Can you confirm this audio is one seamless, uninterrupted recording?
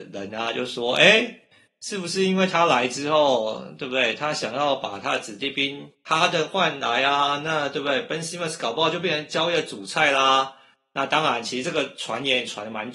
yes; 0 cuts

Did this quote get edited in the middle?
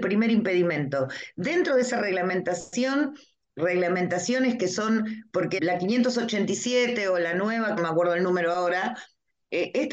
yes; 2 cuts; at 5.6 s, 7.8 s

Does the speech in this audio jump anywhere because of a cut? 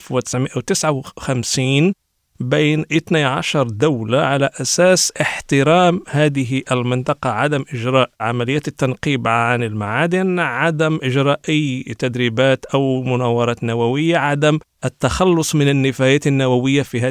yes; 1 cut; at 8.1 s

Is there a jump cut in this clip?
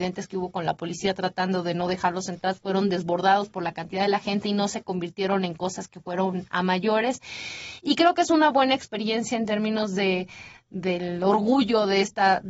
no; 0 cuts

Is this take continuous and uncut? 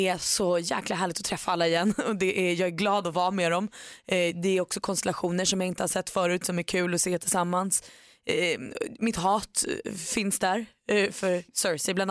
yes; 0 cuts

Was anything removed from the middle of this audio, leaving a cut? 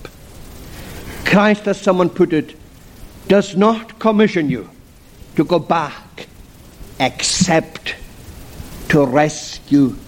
no; 0 cuts

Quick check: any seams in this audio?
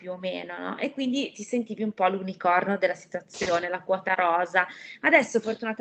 no; 0 cuts

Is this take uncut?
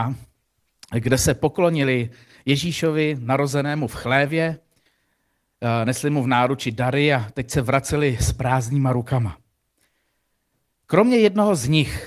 yes; 0 cuts

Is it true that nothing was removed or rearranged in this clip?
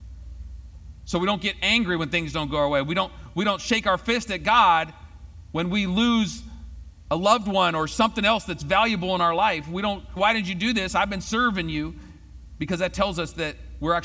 no; 1 cut; at 10.2 s

